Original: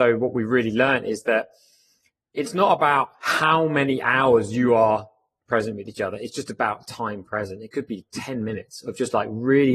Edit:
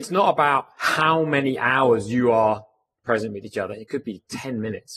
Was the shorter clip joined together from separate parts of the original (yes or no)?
yes